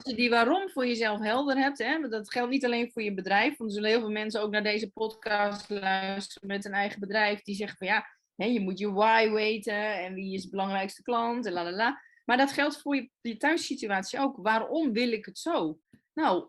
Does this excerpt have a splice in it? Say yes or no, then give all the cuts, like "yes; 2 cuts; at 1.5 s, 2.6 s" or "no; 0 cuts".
no; 0 cuts